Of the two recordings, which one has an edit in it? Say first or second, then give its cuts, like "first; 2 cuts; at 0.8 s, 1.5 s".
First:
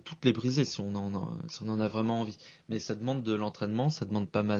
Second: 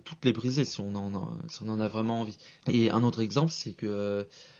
second; 1 cut; at 2.6 s